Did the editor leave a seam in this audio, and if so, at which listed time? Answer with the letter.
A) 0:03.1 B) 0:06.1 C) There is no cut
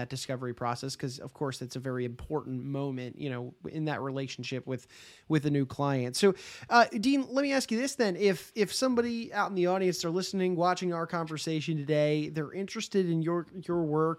C